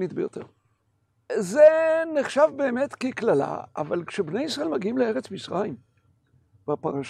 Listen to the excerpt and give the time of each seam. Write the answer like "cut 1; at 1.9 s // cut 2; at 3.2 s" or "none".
cut 1; at 1.3 s